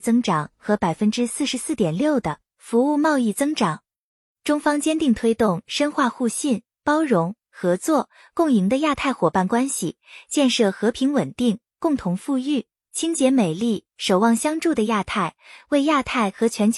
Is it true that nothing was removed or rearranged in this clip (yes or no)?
yes